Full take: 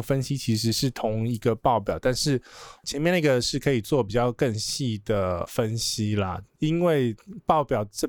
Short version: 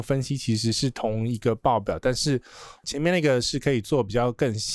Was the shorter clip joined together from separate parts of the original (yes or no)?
no